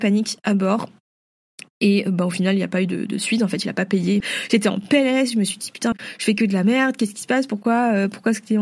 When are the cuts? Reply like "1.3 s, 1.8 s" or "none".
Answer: 4.2 s, 5.9 s